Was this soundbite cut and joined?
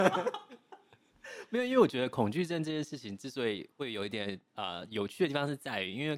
no; 0 cuts

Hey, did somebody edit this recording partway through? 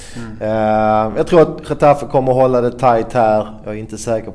no; 0 cuts

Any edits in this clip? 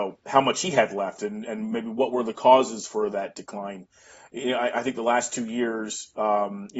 no; 0 cuts

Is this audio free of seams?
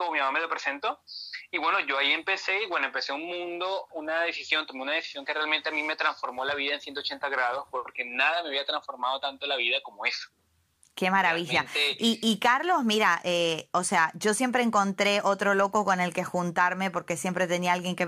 no; 1 cut; at 3.9 s

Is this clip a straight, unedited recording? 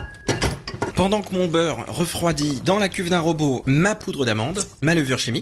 no; 2 cuts; at 0.9 s, 3.6 s

